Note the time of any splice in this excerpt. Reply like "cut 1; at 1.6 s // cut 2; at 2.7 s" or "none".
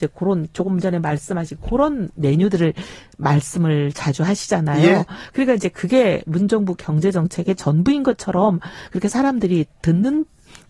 none